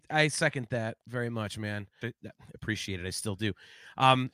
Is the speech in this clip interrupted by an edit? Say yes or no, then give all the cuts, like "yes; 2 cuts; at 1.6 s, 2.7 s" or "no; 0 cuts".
yes; 1 cut; at 2.0 s